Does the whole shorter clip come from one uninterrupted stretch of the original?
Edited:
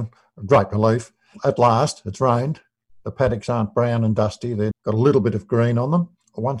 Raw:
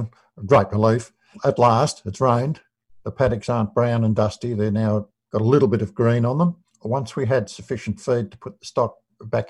no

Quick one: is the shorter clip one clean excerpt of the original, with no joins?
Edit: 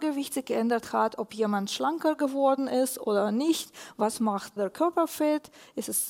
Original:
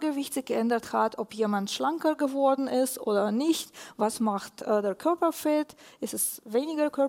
no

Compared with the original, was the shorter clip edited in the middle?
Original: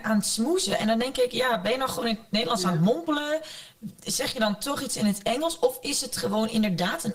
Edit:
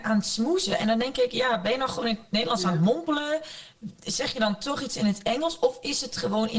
no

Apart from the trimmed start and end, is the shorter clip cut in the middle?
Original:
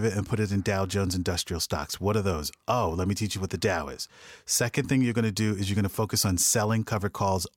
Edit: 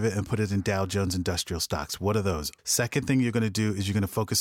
yes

